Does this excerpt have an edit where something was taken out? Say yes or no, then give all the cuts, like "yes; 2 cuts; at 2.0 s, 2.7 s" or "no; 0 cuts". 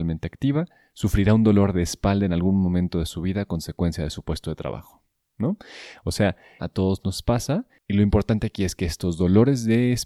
yes; 1 cut; at 6.6 s